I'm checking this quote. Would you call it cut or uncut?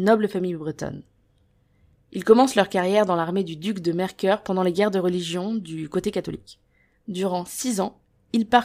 cut